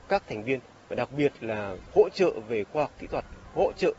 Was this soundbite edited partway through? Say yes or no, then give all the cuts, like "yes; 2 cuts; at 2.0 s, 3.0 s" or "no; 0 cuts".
yes; 1 cut; at 1.9 s